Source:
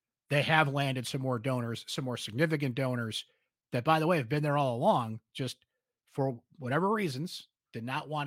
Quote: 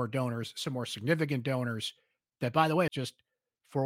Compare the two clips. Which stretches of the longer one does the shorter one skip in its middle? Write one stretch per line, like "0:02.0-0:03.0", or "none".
0:04.2-0:05.3